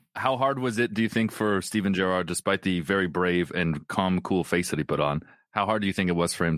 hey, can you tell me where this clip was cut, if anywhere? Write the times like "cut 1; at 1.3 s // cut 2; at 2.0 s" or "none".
none